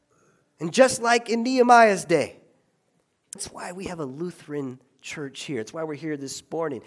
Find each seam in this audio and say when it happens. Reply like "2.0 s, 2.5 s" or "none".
3.4 s